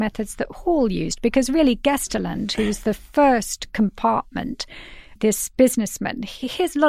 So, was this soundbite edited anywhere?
yes; 1 cut; at 5.2 s

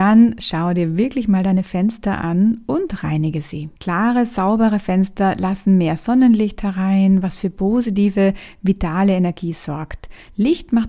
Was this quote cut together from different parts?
no; 0 cuts

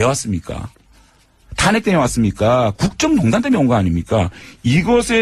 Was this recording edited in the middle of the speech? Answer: yes; 1 cut; at 2.7 s

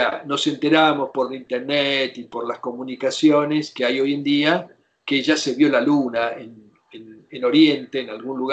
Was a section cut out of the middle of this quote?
no; 0 cuts

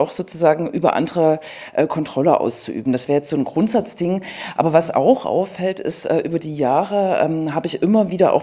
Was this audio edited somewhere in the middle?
no; 0 cuts

